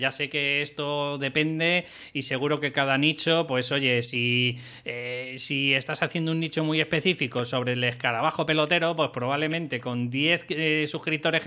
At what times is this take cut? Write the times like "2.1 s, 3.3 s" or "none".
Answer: none